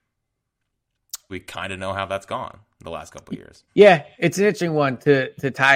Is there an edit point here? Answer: yes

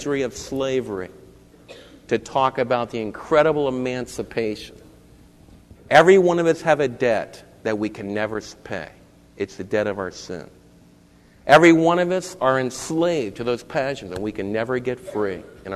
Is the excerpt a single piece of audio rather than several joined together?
no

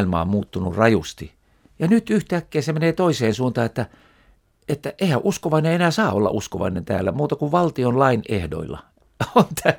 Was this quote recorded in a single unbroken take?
yes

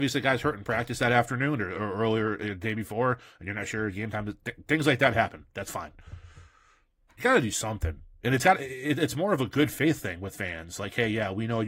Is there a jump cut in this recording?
no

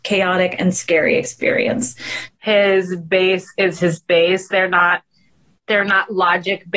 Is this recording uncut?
no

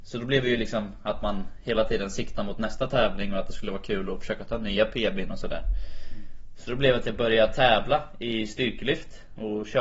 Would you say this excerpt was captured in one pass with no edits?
yes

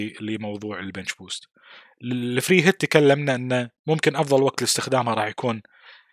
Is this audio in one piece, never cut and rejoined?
yes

